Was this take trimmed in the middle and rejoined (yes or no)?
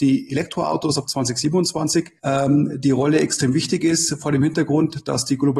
yes